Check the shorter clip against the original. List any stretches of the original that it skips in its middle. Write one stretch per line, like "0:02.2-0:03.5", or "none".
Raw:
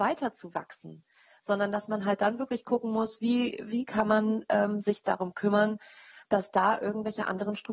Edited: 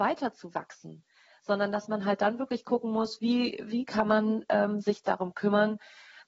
none